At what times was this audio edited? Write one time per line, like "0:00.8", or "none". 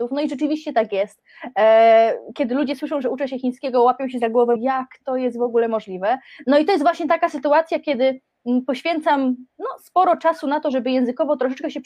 0:04.6
0:06.4